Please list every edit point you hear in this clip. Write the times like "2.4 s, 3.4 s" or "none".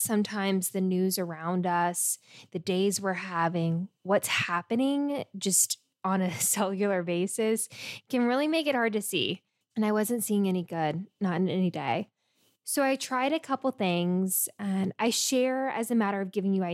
9.6 s